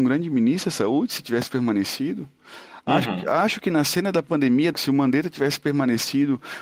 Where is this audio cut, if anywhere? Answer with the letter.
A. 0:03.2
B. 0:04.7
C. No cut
B